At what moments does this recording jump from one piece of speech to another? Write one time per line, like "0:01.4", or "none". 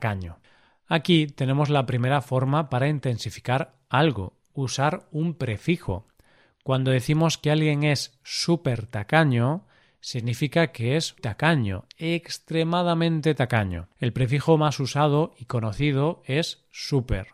0:11.2
0:13.9

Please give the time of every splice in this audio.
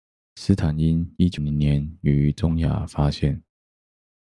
0:01.4

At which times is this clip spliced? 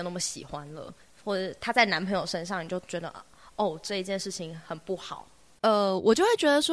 0:05.6

